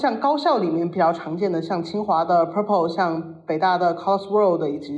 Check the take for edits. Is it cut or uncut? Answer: uncut